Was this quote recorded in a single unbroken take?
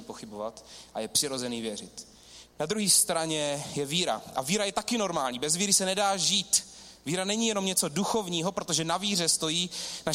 yes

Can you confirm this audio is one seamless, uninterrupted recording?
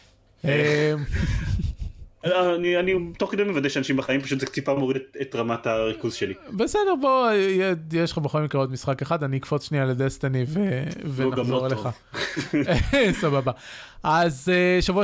yes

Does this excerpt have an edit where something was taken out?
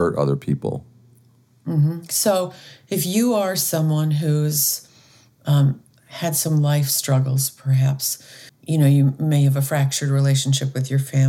yes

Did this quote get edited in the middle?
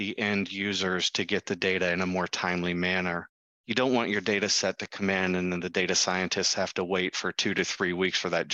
no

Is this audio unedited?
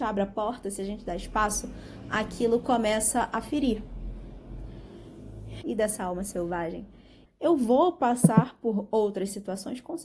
no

